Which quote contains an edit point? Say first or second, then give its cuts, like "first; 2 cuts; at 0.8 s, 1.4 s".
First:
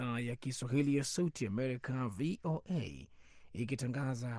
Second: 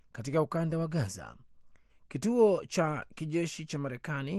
second; 1 cut; at 1.9 s